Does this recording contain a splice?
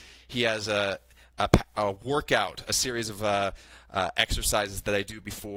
no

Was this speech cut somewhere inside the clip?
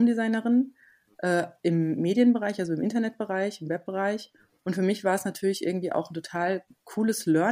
no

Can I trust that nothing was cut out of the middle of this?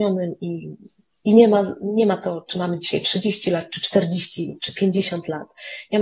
yes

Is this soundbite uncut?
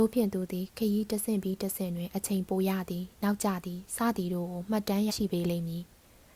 no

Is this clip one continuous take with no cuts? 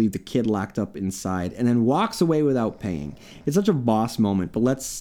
yes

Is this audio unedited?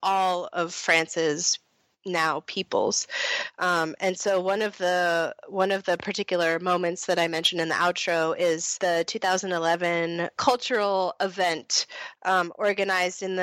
yes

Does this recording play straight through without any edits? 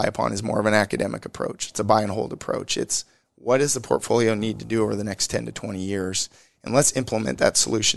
yes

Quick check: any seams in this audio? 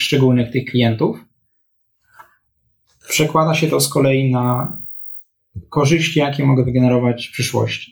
no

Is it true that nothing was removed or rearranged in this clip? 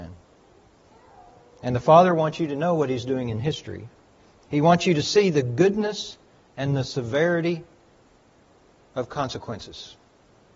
yes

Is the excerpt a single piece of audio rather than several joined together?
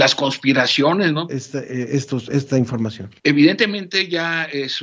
no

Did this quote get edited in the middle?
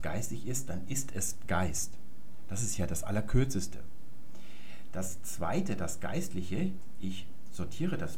no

